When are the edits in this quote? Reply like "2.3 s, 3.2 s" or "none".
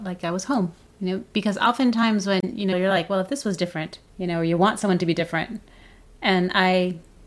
2.7 s, 4.1 s